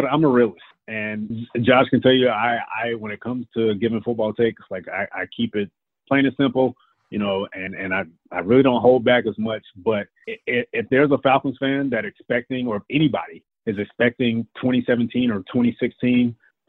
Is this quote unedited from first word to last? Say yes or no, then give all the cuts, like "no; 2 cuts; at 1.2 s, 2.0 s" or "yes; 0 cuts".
yes; 0 cuts